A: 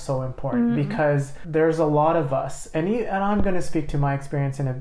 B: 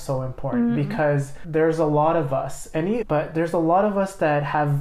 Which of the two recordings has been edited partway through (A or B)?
B